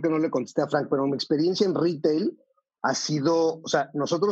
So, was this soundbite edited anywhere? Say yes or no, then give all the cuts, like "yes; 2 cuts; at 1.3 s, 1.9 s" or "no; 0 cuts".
no; 0 cuts